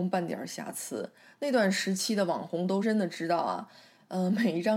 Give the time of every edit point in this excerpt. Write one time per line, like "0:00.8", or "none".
0:02.8